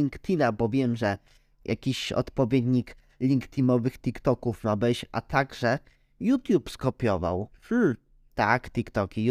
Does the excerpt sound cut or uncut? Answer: uncut